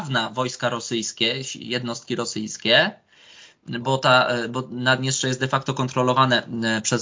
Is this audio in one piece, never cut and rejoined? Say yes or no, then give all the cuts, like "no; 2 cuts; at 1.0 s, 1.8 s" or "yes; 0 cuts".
no; 1 cut; at 3.8 s